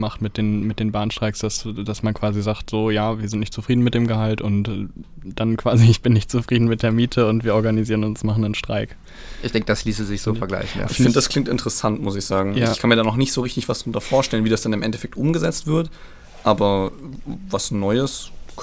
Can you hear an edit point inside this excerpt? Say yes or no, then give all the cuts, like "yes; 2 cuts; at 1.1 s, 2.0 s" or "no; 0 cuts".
no; 0 cuts